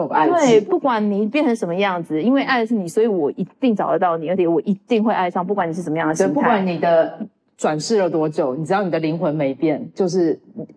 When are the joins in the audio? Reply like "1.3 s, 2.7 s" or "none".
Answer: none